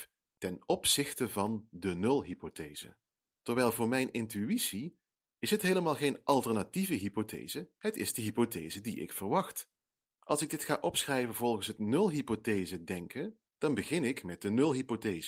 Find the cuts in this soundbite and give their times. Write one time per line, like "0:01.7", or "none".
0:03.3
0:10.1
0:13.5